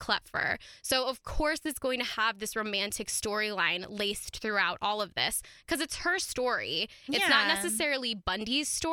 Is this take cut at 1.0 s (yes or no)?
no